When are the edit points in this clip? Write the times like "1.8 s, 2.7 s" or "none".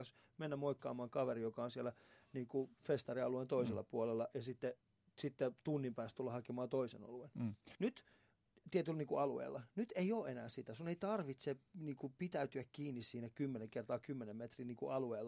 7.7 s